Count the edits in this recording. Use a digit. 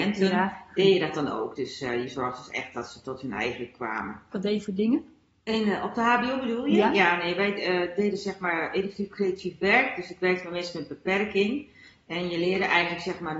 1